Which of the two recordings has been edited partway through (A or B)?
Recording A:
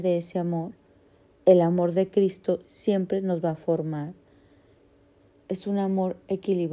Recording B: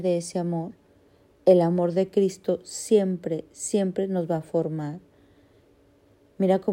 A